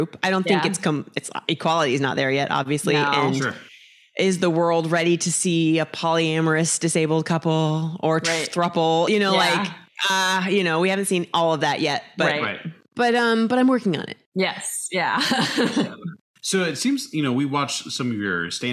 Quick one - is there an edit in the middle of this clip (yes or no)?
no